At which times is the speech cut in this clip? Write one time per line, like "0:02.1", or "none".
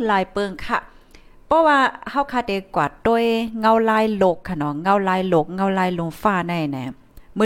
none